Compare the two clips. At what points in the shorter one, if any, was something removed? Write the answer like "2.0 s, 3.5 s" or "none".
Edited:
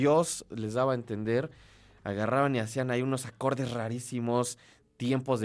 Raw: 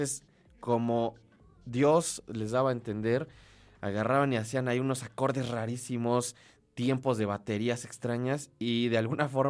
none